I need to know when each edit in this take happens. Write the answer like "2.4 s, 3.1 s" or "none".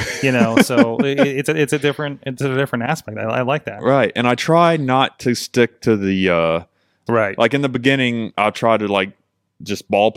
7.1 s